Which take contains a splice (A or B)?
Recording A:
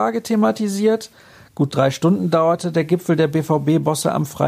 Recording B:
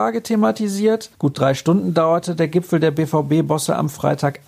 B